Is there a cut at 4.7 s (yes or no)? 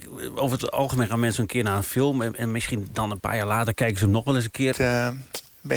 yes